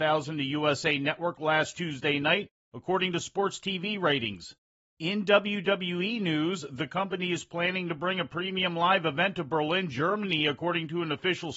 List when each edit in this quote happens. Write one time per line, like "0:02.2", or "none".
0:04.8